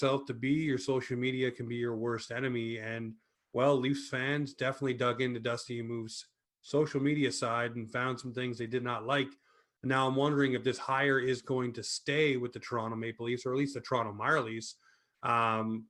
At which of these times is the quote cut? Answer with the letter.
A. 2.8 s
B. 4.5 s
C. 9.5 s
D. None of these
D